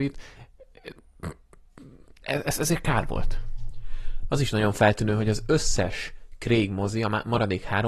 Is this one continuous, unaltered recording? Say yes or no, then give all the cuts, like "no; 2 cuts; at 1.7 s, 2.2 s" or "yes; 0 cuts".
no; 1 cut; at 4.3 s